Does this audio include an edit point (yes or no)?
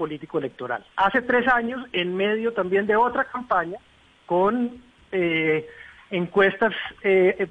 yes